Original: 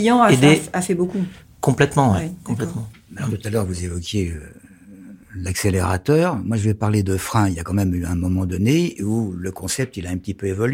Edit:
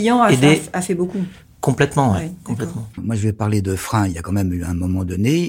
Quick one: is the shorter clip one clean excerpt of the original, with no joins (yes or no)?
no